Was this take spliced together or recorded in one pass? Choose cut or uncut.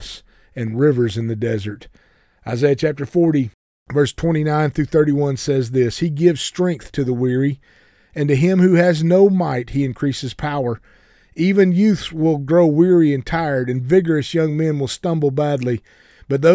uncut